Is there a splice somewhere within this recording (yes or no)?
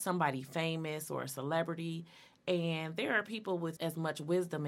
yes